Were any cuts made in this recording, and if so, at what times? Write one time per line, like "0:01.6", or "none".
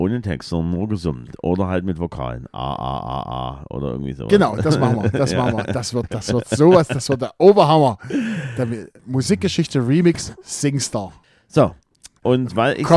none